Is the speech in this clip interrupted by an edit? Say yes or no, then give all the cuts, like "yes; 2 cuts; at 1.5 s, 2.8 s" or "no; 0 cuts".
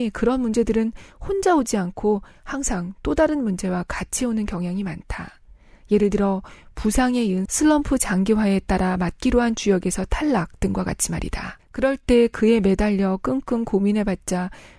yes; 1 cut; at 7.5 s